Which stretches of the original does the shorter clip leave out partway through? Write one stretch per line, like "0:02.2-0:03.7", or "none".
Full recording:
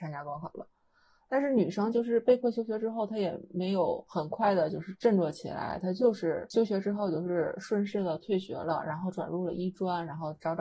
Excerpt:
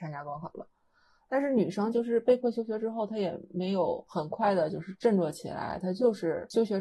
none

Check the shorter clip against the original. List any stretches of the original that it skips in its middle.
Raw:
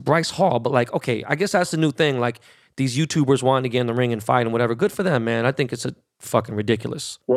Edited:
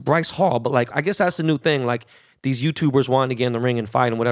0:00.9-0:01.2

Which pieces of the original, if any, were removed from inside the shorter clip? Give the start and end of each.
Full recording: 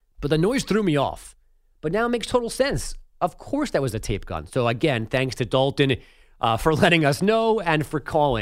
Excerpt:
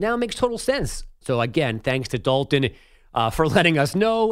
0:03.1-0:04.5

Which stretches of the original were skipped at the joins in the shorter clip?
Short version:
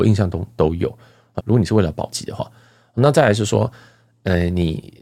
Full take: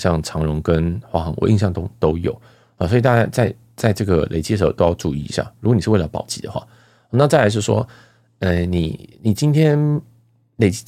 0:02.8-0:05.5

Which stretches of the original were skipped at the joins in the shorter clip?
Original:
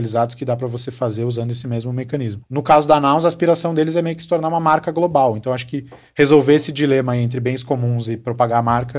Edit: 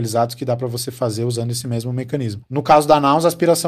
none

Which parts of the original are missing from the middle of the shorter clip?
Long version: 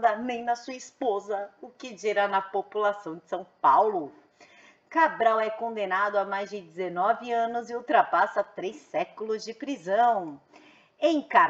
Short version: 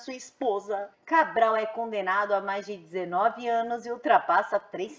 0:01.5-0:04.8

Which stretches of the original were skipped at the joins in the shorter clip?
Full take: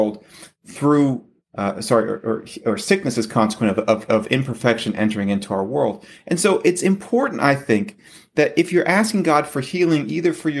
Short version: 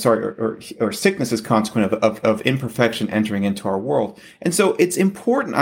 none

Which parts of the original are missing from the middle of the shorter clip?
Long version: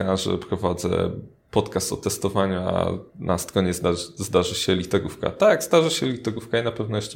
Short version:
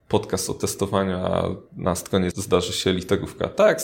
0:03.7-0:04.1

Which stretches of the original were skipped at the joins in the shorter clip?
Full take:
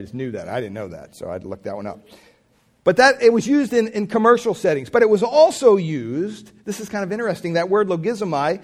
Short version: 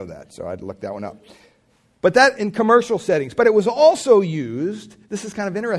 0:03.2-0:03.9

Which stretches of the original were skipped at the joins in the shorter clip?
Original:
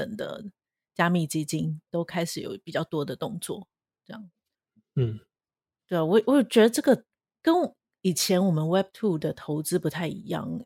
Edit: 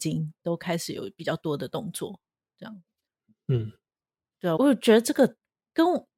0:06.0-0:06.2

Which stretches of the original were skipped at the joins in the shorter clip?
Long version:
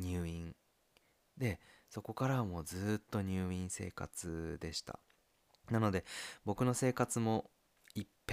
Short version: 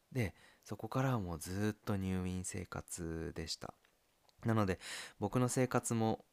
none

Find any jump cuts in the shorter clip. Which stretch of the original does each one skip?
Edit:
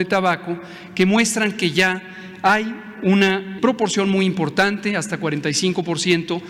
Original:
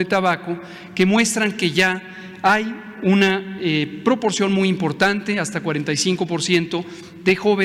0:03.6-0:04.0

